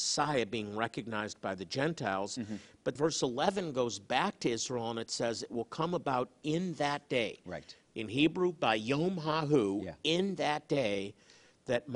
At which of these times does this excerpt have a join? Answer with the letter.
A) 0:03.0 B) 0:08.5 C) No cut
A